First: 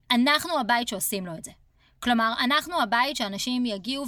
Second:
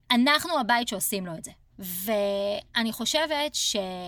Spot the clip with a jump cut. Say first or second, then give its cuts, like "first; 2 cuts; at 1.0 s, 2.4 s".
second; 1 cut; at 1.7 s